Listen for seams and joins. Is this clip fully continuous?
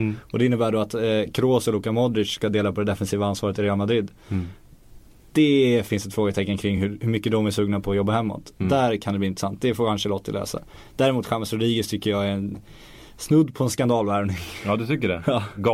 yes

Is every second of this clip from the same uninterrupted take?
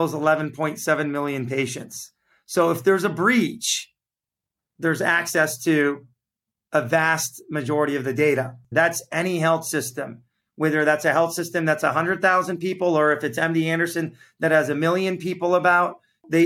no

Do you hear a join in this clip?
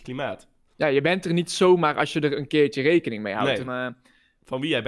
yes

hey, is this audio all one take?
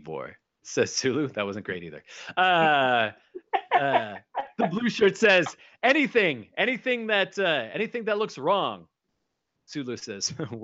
yes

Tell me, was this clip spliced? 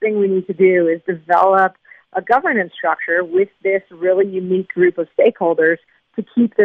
no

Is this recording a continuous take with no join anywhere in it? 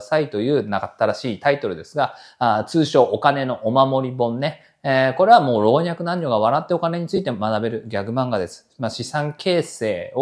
yes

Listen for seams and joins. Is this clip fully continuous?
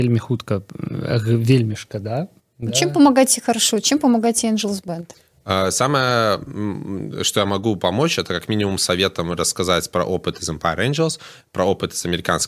yes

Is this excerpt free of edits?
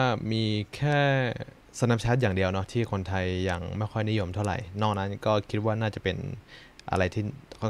yes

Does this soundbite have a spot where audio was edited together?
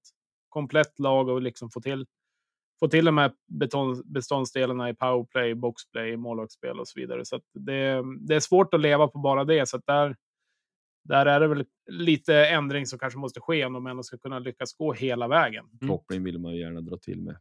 yes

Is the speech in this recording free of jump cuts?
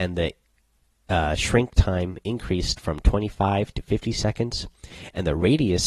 yes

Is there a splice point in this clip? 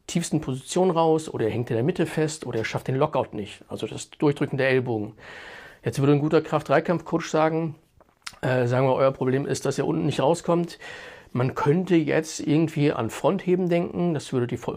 no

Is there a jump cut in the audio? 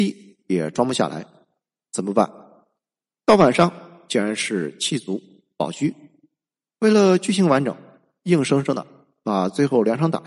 no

